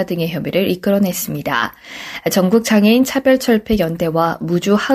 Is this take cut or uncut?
uncut